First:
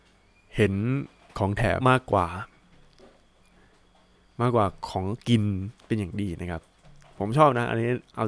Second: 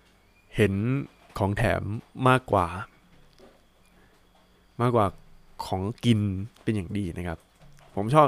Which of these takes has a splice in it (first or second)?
first